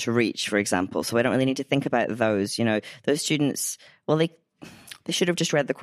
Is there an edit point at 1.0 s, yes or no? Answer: no